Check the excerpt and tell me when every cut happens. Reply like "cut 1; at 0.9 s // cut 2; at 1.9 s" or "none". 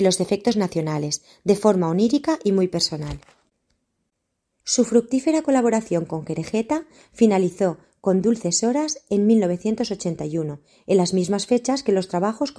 cut 1; at 4.6 s